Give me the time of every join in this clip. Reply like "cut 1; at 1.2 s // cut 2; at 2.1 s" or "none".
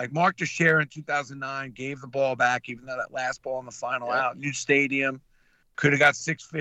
none

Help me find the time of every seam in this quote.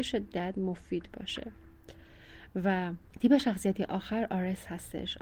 cut 1; at 3.1 s

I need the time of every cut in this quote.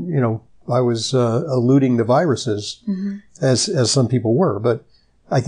none

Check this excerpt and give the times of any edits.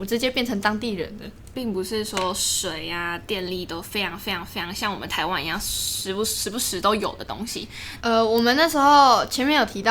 cut 1; at 1.5 s // cut 2; at 8.0 s

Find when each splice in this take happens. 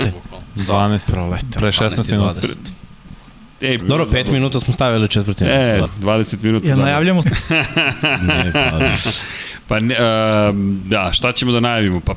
cut 1; at 3.8 s // cut 2; at 5.8 s // cut 3; at 7.2 s

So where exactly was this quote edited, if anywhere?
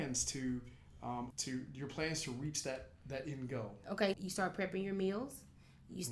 cut 1; at 1.3 s // cut 2; at 4.1 s

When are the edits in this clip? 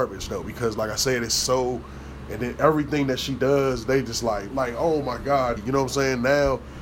cut 1; at 4.5 s // cut 2; at 5.6 s

